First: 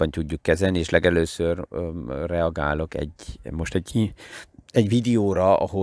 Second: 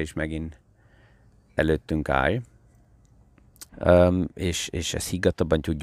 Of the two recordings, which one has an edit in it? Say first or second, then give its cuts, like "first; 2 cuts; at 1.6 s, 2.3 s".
second; 1 cut; at 3.7 s